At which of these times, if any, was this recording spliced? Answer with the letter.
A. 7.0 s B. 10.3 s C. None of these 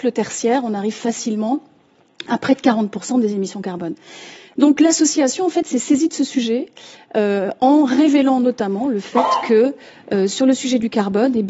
C